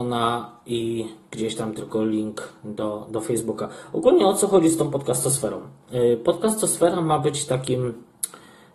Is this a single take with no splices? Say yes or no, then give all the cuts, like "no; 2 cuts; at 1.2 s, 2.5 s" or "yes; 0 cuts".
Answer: yes; 0 cuts